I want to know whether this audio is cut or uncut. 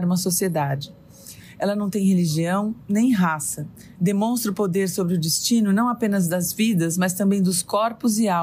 cut